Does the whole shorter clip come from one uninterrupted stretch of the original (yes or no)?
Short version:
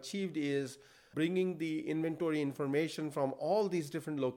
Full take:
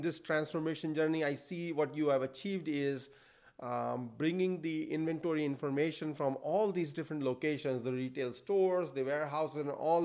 no